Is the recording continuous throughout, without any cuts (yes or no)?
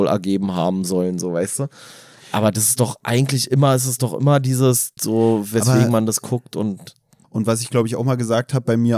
no